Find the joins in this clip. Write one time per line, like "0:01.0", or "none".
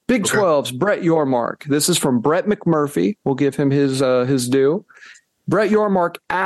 none